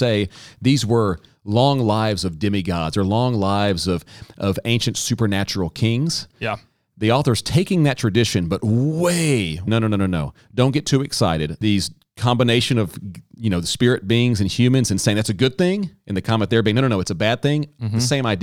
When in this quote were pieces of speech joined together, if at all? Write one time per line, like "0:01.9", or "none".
0:09.7
0:11.6